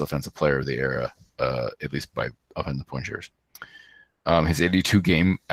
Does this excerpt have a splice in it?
no; 0 cuts

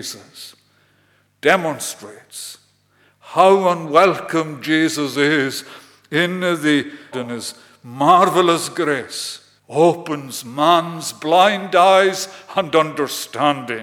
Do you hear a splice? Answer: yes; 2 cuts; at 7.1 s, 9.6 s

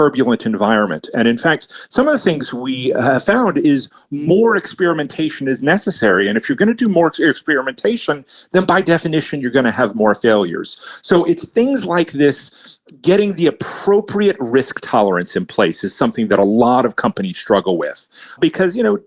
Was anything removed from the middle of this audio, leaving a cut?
no; 0 cuts

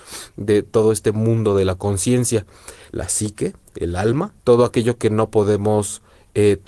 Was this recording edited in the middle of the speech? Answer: yes; 2 cuts; at 2.9 s, 4.4 s

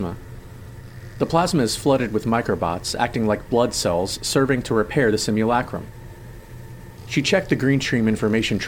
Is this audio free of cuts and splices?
no; 1 cut; at 7.0 s

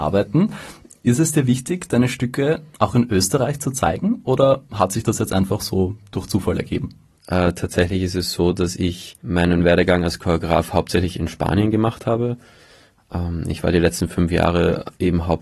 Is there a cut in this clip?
yes; 1 cut; at 7.2 s

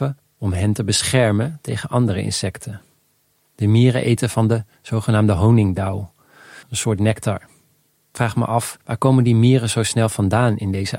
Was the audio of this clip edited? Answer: yes; 2 cuts; at 6.6 s, 8.8 s

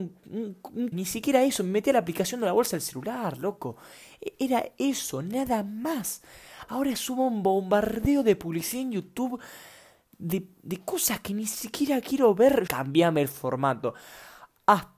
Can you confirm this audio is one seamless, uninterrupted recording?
no; 2 cuts; at 0.9 s, 12.7 s

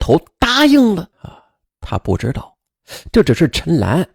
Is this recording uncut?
no; 1 cut; at 1.1 s

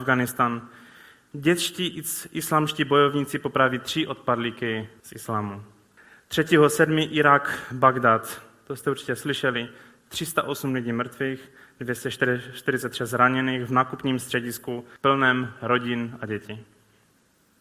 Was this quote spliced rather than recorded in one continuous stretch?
no; 0 cuts

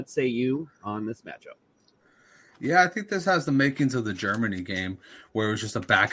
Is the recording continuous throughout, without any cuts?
yes; 0 cuts

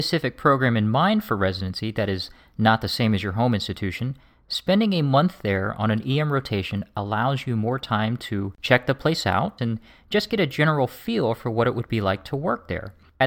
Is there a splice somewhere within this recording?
yes; 1 cut; at 9.6 s

